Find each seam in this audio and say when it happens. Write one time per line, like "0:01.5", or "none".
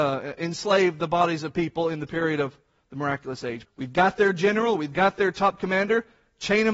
0:03.6